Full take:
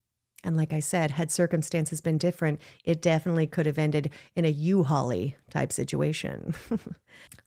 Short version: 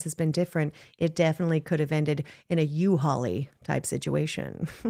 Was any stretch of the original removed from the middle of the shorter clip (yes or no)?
no